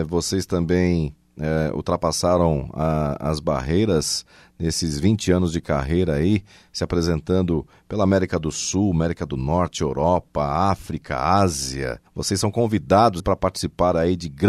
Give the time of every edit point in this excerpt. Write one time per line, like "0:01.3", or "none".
0:12.1
0:13.2